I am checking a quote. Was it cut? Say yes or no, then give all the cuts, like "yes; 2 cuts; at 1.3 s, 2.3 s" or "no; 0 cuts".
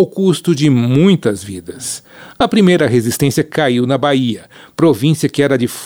no; 0 cuts